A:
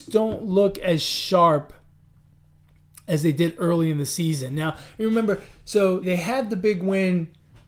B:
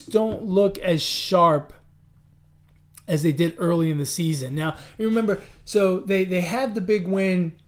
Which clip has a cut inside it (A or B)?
A